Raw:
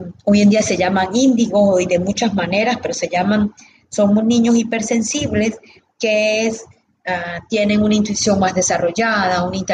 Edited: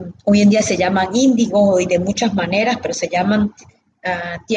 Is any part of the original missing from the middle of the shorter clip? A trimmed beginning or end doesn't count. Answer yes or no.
yes